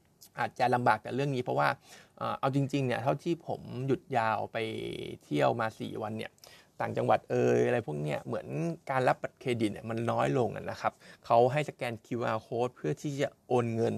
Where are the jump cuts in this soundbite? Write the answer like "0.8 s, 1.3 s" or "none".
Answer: none